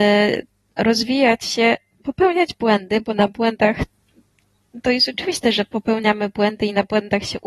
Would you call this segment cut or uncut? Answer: uncut